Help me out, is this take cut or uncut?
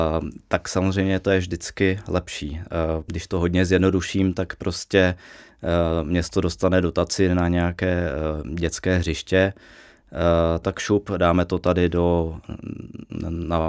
cut